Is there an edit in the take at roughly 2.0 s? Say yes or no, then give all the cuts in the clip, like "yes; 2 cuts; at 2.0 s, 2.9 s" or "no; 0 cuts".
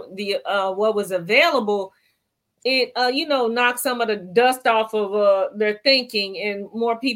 no; 0 cuts